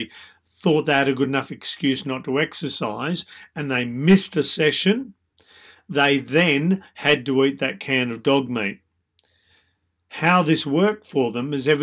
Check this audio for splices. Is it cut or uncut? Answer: uncut